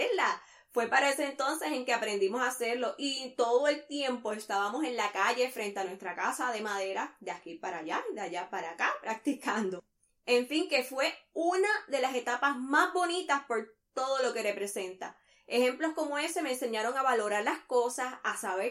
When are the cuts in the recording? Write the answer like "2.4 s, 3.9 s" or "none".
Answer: none